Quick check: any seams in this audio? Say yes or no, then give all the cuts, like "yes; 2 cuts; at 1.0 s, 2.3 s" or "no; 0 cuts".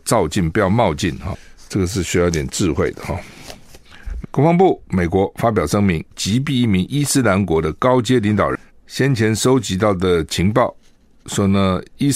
yes; 3 cuts; at 4.2 s, 6.1 s, 8.7 s